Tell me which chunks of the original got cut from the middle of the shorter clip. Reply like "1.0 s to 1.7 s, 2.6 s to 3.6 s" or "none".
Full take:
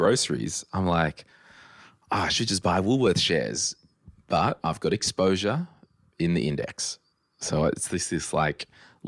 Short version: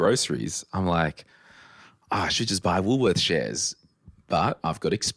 none